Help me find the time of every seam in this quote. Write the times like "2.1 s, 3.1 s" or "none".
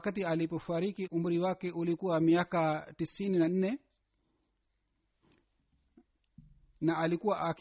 1.1 s